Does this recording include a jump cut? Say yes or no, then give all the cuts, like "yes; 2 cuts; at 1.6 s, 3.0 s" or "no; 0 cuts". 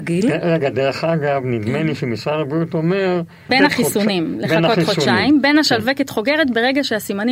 yes; 1 cut; at 3.5 s